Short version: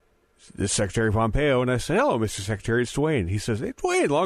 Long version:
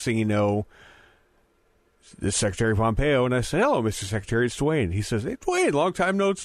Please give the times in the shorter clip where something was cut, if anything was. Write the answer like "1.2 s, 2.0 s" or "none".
none